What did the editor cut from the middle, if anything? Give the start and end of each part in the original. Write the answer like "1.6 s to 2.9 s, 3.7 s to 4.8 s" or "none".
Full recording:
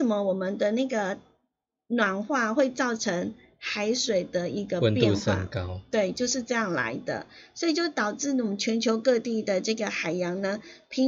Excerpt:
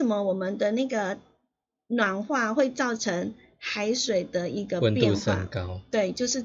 none